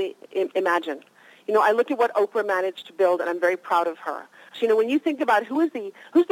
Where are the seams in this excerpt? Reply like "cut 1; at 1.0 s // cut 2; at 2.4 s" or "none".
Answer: cut 1; at 4.5 s